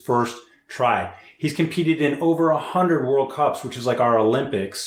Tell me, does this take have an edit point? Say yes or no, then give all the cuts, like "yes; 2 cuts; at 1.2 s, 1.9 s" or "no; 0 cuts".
no; 0 cuts